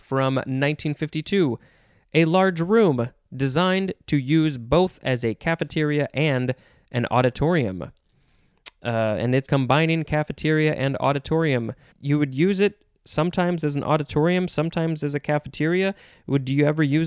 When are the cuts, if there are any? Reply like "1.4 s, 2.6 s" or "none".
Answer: 9.5 s, 11.9 s